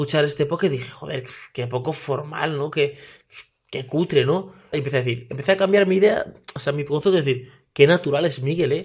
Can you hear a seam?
yes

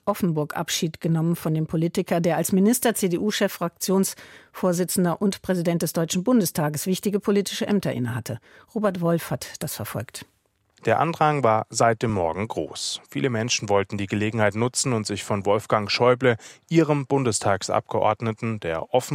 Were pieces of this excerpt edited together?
no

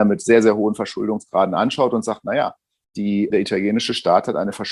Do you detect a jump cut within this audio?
yes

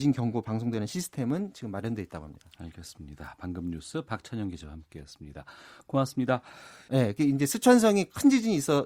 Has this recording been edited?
yes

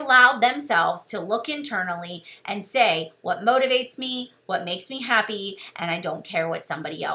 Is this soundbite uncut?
yes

